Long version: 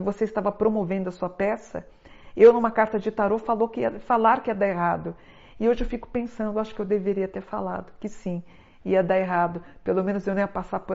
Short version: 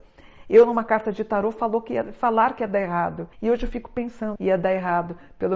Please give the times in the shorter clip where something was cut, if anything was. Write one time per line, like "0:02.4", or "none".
0:03.3
0:04.4